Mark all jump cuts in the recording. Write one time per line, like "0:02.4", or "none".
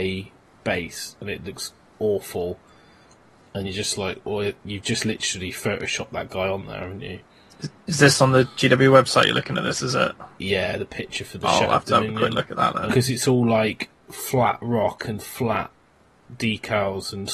0:12.9

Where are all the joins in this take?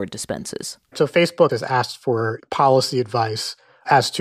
0:01.5

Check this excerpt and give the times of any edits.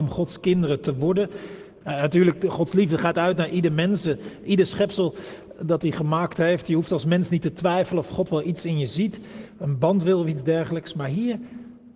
0:01.8

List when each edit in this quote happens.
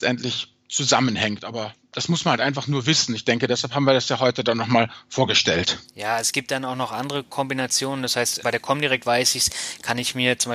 0:08.4

